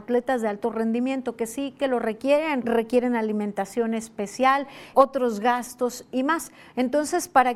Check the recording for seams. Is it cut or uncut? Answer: cut